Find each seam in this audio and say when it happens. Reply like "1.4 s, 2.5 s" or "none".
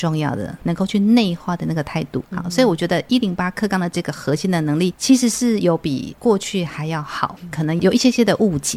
7.5 s